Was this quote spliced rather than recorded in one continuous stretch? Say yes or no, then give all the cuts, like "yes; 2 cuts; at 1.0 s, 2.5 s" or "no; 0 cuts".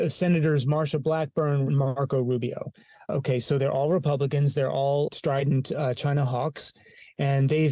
yes; 2 cuts; at 1.7 s, 5.1 s